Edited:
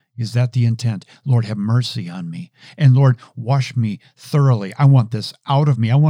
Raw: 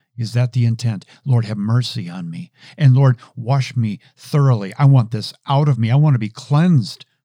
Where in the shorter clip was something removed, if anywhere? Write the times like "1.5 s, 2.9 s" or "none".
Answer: none